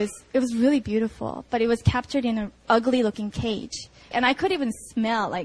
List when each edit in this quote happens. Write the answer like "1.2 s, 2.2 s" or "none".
2.6 s, 4.1 s